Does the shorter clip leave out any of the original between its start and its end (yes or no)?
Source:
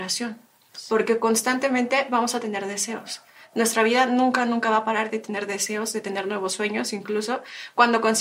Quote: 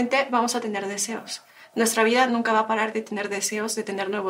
yes